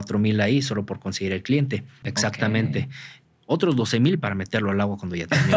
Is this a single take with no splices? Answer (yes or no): no